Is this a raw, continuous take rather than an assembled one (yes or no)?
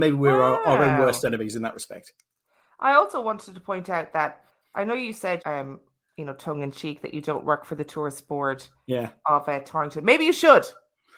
no